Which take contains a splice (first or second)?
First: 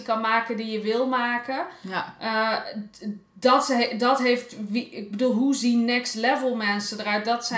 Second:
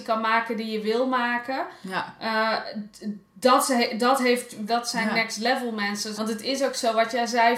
second